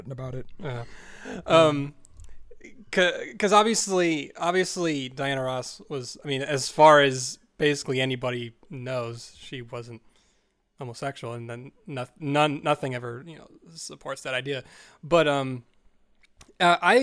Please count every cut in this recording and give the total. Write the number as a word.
zero